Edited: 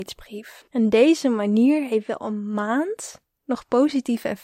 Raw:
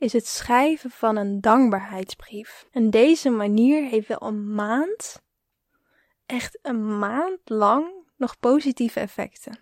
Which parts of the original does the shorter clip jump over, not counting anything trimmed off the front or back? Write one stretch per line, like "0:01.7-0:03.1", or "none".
0:05.4-0:08.1